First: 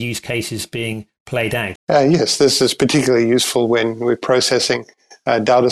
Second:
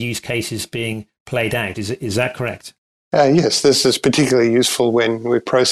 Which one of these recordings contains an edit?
first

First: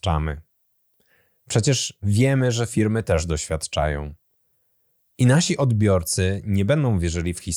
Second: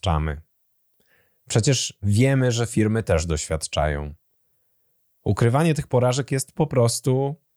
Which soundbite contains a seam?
first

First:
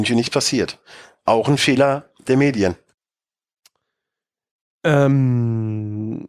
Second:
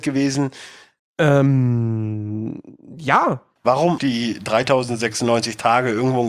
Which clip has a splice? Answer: second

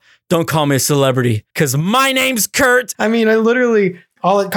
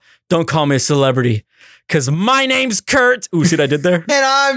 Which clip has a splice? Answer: first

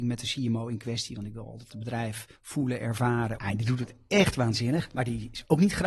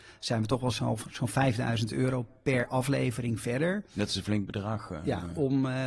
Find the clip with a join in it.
first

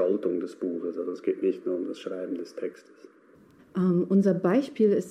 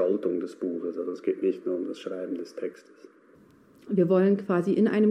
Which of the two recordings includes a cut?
first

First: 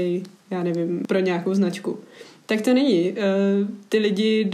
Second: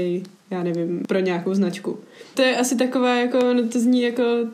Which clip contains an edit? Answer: second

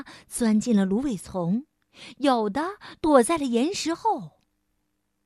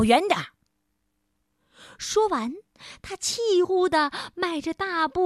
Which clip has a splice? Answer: second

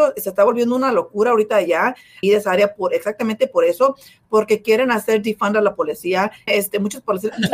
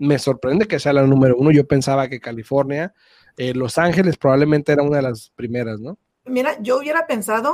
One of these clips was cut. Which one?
first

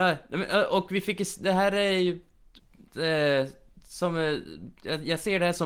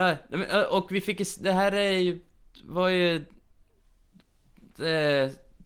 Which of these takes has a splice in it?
first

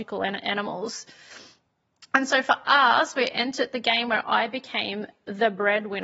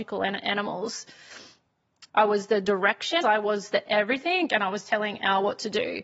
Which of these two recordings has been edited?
second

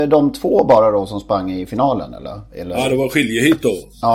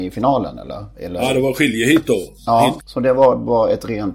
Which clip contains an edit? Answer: second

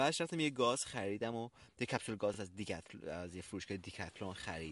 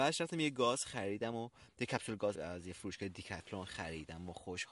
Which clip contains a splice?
second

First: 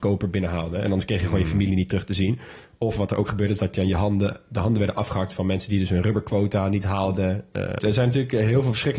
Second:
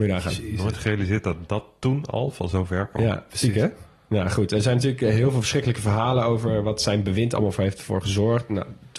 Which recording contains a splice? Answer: first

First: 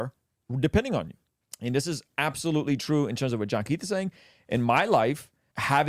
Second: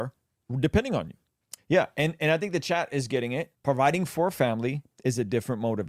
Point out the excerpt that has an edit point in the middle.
second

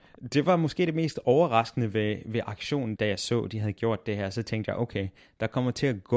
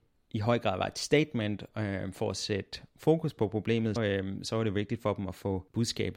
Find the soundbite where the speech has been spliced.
second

